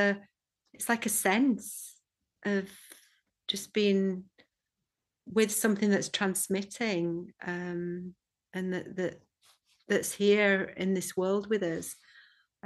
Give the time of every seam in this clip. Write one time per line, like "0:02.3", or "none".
none